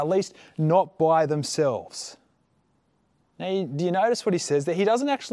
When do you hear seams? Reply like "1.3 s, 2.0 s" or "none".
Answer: 3.2 s

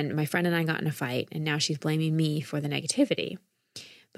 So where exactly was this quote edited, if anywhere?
none

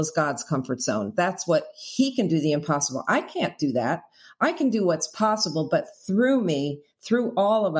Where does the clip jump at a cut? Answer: none

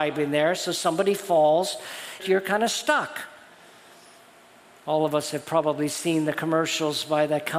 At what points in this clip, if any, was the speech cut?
2.2 s

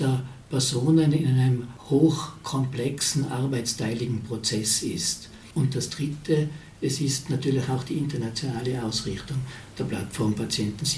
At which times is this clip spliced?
5.5 s

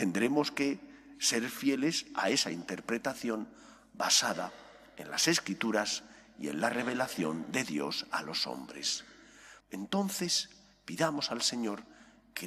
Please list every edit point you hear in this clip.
9.6 s

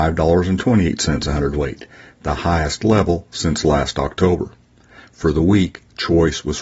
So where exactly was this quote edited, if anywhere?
none

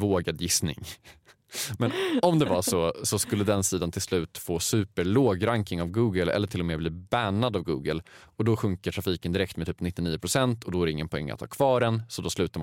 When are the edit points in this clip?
none

